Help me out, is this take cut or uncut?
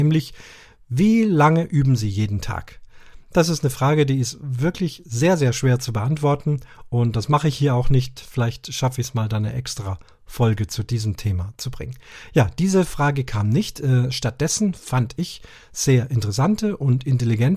uncut